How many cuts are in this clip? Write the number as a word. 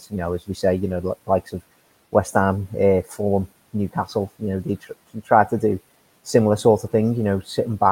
zero